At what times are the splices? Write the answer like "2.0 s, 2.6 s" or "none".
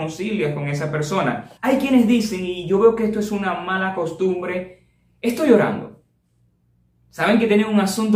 1.6 s

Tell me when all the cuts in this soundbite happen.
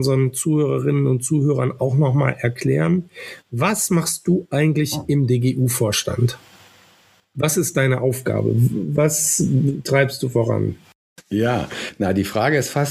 none

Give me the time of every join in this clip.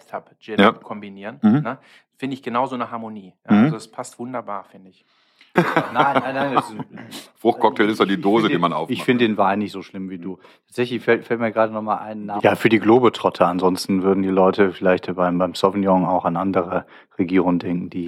5.6 s, 12.4 s

